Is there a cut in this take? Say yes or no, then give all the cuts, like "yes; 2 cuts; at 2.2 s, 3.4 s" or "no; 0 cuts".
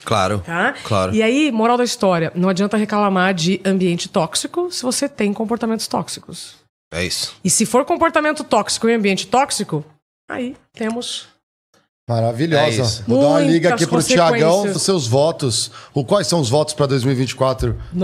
yes; 1 cut; at 14.7 s